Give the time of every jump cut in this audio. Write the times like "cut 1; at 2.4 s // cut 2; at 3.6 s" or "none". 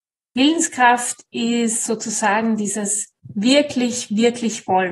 none